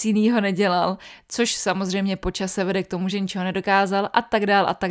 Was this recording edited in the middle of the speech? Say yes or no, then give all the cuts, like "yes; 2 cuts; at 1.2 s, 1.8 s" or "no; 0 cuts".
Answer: yes; 1 cut; at 3.1 s